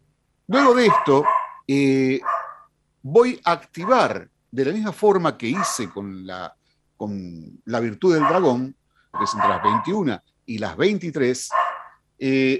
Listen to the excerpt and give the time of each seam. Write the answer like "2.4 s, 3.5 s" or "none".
1.6 s, 9.1 s

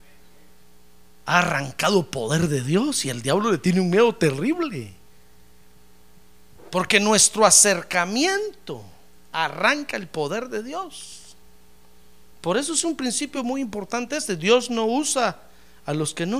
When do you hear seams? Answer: none

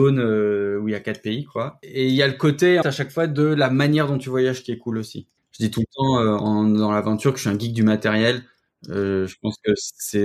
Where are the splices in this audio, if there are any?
2.8 s

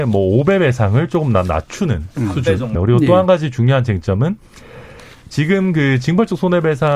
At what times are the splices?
2.8 s

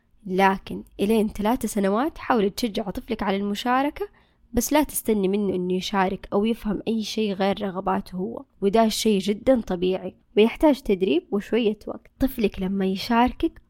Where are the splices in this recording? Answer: 8.5 s

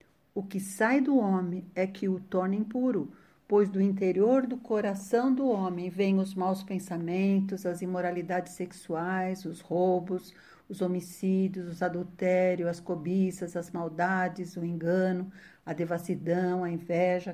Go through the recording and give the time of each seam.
none

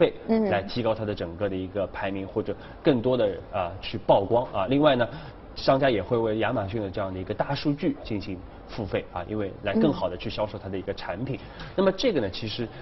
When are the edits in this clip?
none

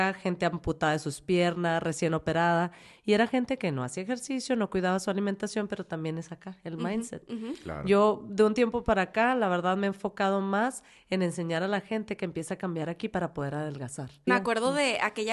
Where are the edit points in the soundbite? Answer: 14.3 s

